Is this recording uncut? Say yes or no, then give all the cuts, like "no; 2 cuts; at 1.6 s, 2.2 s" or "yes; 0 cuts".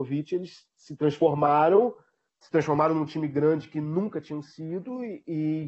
yes; 0 cuts